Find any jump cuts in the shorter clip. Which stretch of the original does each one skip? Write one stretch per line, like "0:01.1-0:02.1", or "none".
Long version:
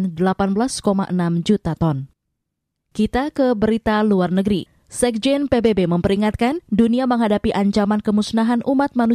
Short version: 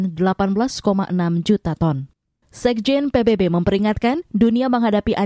0:02.4-0:04.8